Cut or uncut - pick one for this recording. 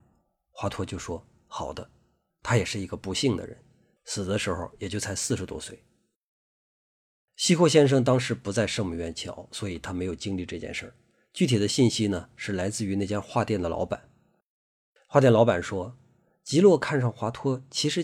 cut